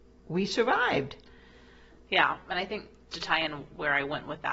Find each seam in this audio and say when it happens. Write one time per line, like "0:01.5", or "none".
0:03.1